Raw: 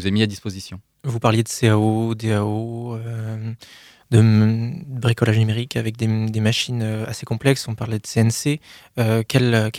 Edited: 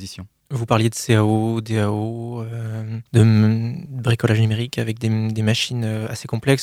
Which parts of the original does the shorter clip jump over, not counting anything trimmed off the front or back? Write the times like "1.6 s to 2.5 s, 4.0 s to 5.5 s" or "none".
3.6 s to 4.0 s